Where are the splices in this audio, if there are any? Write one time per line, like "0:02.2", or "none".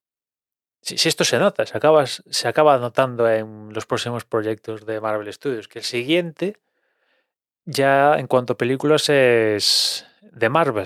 none